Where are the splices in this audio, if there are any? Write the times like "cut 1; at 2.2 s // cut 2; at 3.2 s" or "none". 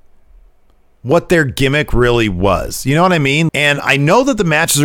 cut 1; at 3.5 s